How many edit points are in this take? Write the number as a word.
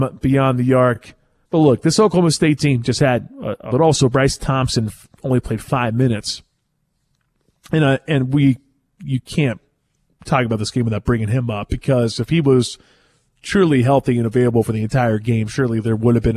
two